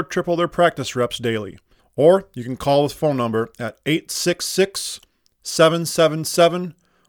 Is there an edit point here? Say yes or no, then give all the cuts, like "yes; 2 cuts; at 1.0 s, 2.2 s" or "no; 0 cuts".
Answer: yes; 1 cut; at 1.8 s